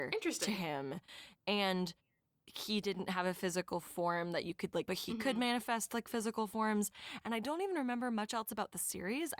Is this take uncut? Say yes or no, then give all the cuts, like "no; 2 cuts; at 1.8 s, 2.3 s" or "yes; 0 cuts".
no; 1 cut; at 4.8 s